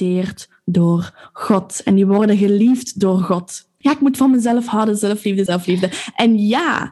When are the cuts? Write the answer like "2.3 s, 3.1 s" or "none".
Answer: 3.8 s, 5.5 s